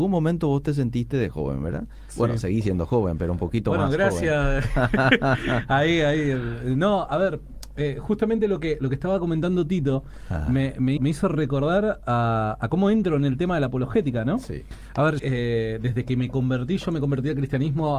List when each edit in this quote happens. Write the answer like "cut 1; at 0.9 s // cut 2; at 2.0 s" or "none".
cut 1; at 11.0 s // cut 2; at 15.2 s